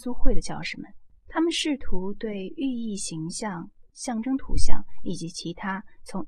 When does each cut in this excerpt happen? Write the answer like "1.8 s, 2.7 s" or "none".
1.1 s, 3.9 s